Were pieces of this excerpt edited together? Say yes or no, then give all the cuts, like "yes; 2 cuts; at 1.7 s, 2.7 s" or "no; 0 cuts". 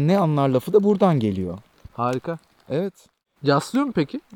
yes; 1 cut; at 3.4 s